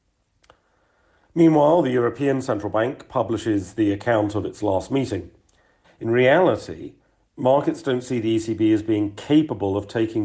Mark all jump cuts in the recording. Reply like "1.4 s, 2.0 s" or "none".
5.8 s